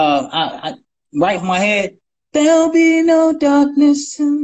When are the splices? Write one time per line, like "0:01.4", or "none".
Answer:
0:01.3